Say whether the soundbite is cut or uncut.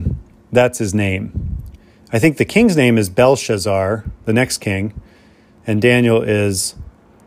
uncut